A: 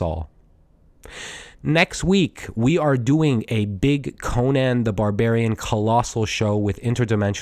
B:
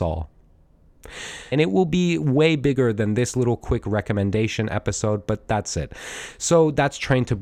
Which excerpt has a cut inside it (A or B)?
B